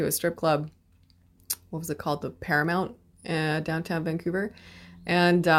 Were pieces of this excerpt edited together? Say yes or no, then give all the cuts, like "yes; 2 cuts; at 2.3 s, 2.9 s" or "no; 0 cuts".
no; 0 cuts